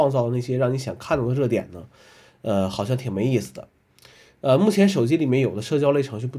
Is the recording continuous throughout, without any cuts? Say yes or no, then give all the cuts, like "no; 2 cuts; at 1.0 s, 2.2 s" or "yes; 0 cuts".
yes; 0 cuts